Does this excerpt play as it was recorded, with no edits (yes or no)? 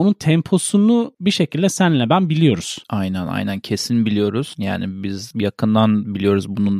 yes